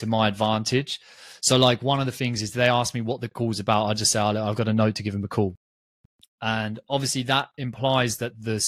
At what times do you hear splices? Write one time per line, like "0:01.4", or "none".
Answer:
none